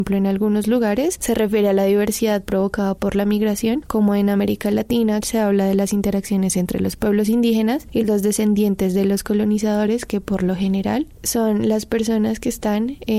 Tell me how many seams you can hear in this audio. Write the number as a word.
two